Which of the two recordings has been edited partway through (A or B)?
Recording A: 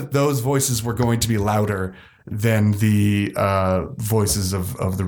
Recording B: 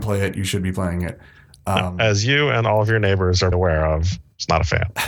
B